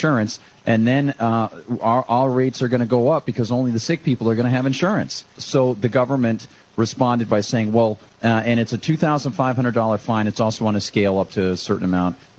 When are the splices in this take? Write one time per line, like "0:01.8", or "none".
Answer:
0:05.4
0:08.1